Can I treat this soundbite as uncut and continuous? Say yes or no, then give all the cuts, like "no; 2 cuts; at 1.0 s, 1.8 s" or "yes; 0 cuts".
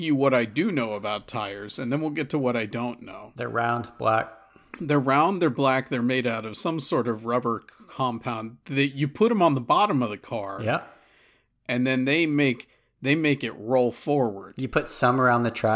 yes; 0 cuts